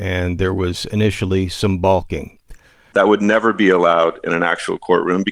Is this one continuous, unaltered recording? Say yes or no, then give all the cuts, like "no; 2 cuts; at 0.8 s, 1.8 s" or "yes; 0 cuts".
no; 1 cut; at 2.9 s